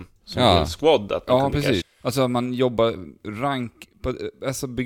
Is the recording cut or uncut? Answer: cut